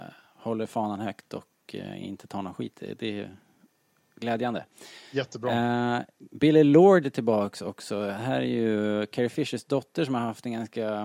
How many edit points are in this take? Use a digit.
0